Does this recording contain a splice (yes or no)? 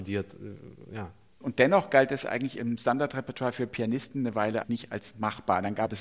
yes